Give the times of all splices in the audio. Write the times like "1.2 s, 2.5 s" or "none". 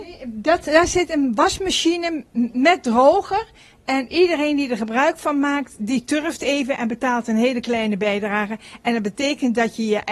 none